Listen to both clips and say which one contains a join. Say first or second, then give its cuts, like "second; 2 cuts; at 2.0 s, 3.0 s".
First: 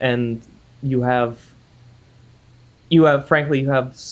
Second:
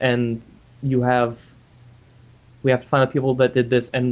second; 1 cut; at 2.6 s